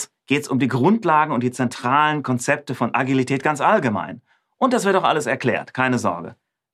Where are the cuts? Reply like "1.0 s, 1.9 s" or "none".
none